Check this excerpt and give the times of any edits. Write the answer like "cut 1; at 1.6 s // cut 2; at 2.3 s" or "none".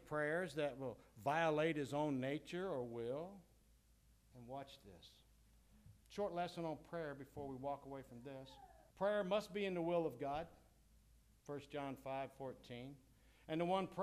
cut 1; at 4.3 s // cut 2; at 6.0 s // cut 3; at 8.9 s